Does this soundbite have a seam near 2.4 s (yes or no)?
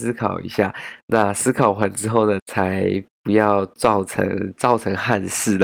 yes